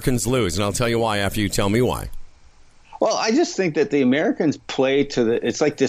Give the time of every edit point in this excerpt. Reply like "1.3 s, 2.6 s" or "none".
none